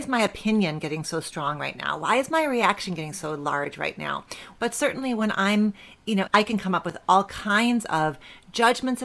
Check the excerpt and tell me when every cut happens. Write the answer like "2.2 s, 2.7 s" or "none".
4.6 s, 6.3 s